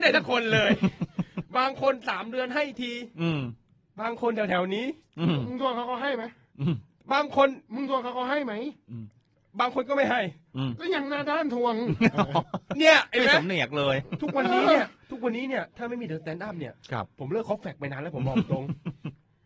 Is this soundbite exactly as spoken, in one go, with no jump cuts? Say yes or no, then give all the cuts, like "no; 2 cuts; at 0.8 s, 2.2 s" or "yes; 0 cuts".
yes; 0 cuts